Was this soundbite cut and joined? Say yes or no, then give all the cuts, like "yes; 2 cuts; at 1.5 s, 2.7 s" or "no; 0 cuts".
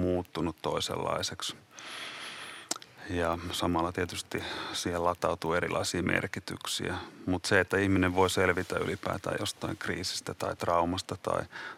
no; 0 cuts